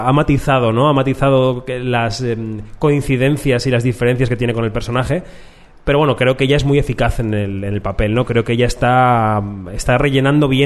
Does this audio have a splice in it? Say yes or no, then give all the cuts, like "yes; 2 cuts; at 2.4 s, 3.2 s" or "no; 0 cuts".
no; 0 cuts